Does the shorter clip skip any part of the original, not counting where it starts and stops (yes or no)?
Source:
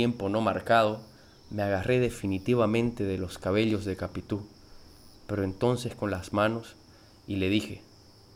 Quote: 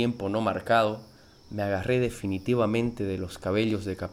no